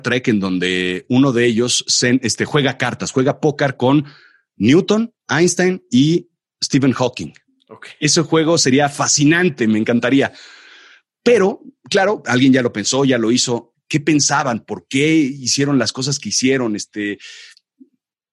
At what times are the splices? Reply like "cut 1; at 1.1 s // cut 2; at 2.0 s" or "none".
cut 1; at 5.2 s // cut 2; at 13.7 s